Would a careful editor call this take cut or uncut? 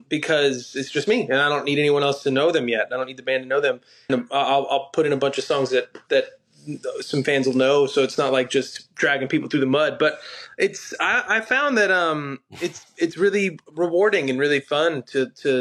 cut